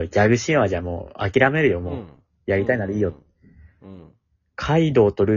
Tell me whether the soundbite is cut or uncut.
uncut